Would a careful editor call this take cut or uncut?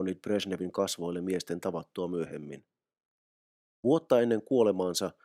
cut